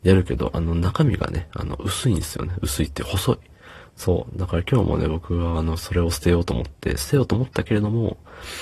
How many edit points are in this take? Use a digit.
1